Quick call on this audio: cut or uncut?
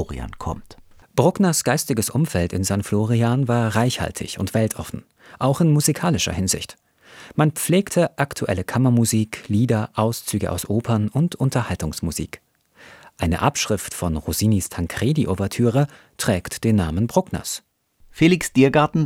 uncut